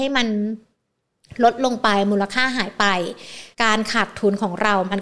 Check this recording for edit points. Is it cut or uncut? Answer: cut